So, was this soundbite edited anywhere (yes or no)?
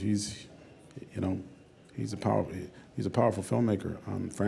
no